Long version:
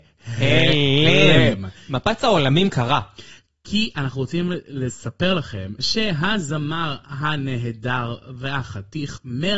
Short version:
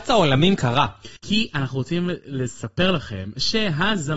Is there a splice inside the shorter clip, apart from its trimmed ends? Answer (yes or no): yes